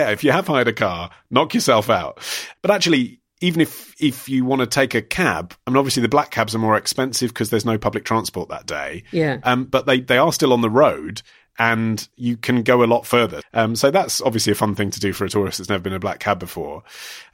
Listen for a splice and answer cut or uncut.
cut